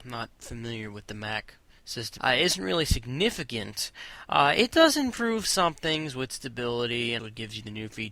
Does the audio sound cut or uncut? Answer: cut